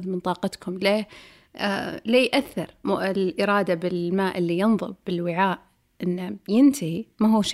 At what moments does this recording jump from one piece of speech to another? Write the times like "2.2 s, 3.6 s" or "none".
2.8 s